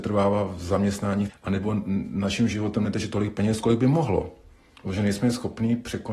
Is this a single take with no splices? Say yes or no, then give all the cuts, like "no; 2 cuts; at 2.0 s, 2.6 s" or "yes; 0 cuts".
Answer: no; 1 cut; at 1.3 s